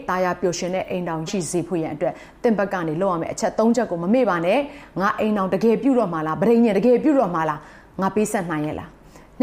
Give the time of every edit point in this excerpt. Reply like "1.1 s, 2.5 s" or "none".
1.3 s

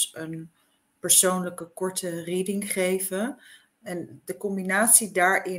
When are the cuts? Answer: 3.7 s

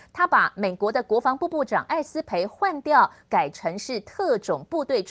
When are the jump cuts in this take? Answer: none

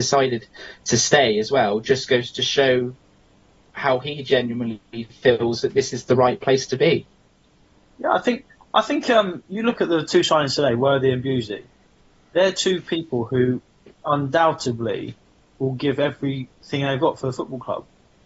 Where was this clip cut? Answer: none

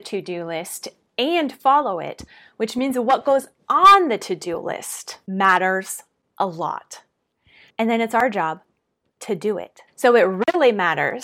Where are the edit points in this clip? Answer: 7.7 s

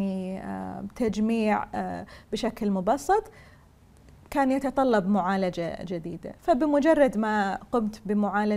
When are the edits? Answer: none

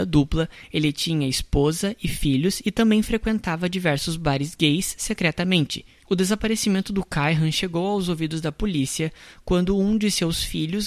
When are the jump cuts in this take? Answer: 6.0 s

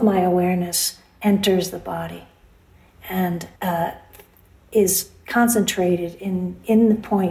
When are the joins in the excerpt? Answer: 3.6 s

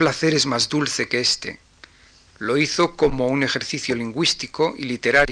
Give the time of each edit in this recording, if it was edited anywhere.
2.3 s

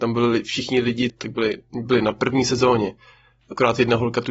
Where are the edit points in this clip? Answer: 1.1 s

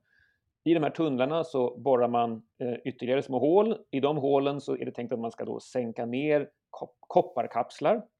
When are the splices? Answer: none

